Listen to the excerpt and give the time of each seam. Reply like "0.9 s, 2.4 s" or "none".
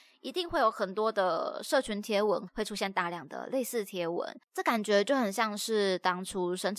2.5 s